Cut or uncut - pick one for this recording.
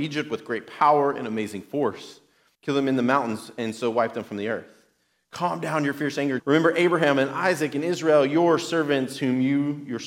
cut